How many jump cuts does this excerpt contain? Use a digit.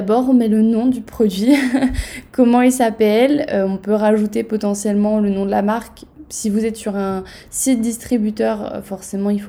0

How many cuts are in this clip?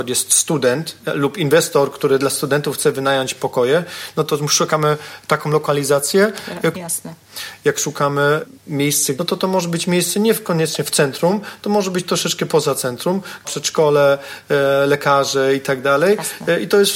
3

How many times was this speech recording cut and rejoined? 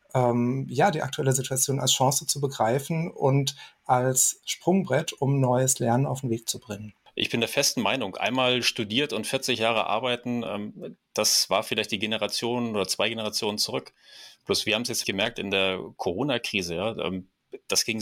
1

